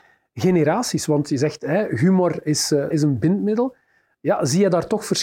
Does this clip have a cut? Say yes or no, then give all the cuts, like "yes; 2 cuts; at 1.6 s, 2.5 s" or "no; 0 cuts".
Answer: yes; 1 cut; at 2.9 s